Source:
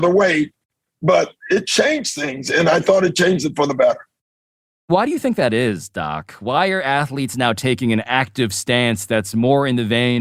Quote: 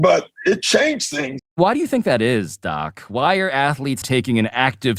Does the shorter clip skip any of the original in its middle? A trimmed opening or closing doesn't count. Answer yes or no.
yes